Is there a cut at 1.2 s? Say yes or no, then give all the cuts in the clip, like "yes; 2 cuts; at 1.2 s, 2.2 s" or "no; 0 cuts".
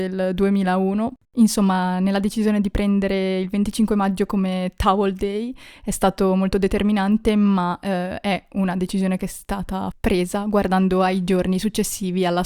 yes; 1 cut; at 1.2 s